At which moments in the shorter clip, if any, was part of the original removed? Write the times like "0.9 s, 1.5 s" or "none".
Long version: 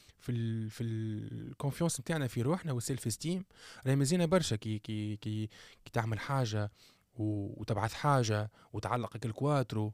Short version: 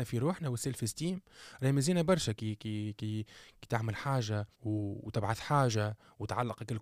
4.5 s